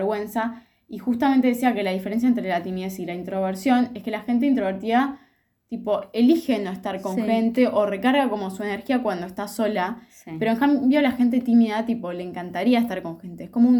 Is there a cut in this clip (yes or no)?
no